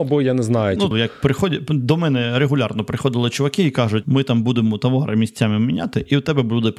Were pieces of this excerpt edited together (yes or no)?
yes